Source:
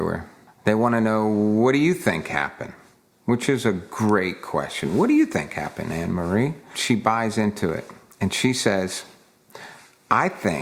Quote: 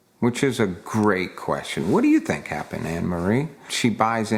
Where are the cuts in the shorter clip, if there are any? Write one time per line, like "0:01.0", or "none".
none